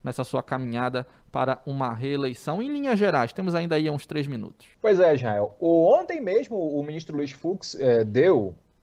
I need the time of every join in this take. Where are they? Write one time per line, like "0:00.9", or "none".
0:04.7